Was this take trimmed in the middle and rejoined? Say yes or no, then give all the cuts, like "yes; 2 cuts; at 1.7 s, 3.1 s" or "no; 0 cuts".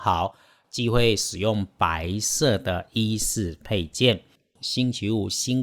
yes; 1 cut; at 4.6 s